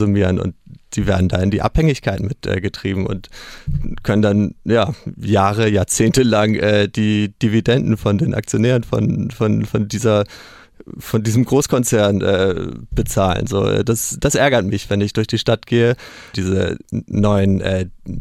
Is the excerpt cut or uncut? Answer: cut